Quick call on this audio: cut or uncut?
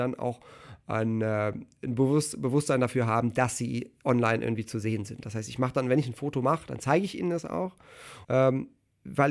cut